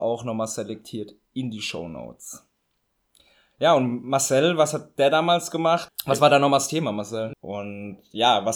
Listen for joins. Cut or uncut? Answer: cut